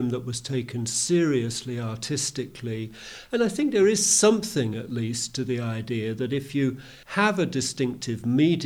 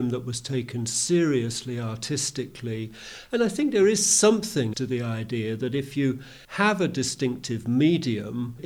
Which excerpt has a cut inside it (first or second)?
second